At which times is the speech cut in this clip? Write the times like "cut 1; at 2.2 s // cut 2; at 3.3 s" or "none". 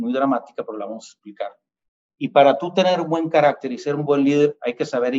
none